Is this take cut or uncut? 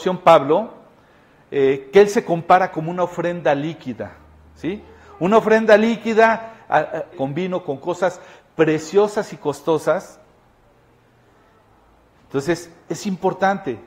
cut